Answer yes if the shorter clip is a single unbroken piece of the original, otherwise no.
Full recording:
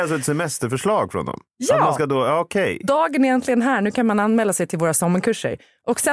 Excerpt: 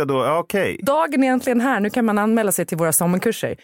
yes